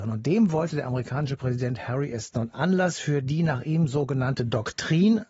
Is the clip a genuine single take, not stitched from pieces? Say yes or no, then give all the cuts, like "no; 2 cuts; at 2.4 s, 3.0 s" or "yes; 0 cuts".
no; 1 cut; at 2.3 s